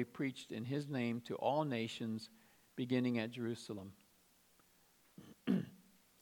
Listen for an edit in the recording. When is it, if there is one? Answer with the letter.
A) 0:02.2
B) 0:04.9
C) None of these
B